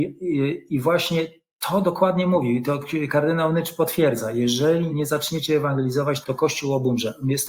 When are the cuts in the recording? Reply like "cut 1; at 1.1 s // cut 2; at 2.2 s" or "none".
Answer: cut 1; at 4.9 s // cut 2; at 6.2 s

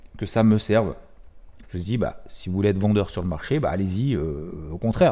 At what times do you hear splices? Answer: cut 1; at 1.6 s

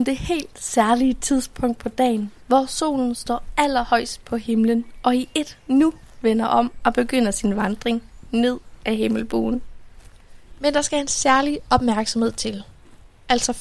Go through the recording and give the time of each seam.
cut 1; at 10.6 s

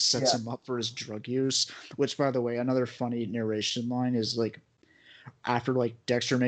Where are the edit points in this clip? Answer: none

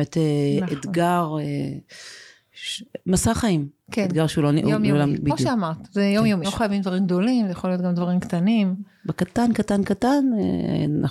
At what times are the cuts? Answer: cut 1; at 6.4 s

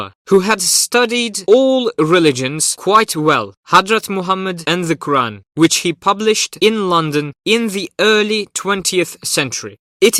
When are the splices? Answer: cut 1; at 3.6 s

